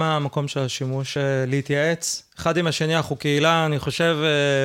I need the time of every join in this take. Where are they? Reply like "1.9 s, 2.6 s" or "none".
none